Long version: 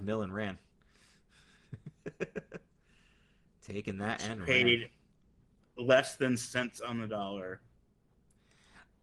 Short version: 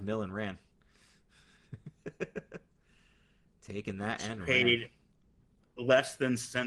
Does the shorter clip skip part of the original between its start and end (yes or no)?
no